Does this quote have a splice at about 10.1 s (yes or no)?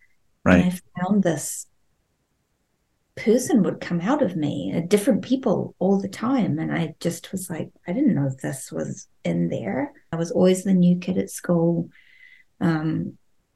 yes